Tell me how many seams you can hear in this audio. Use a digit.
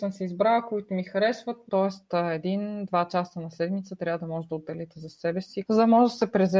2